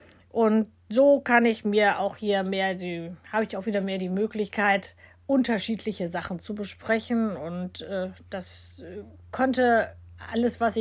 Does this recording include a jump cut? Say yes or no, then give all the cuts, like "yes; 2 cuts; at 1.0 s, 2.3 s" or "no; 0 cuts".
no; 0 cuts